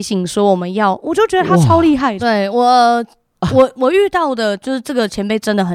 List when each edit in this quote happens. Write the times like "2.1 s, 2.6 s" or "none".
2.2 s, 3.5 s